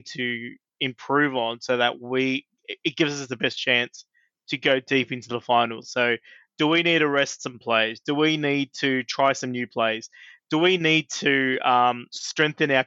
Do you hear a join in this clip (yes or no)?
no